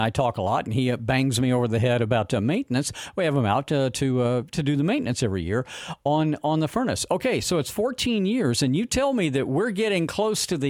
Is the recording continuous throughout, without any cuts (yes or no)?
yes